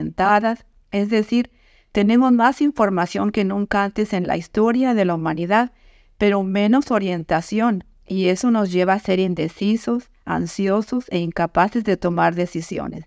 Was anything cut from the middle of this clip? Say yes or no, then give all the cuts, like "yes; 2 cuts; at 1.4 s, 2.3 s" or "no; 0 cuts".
no; 0 cuts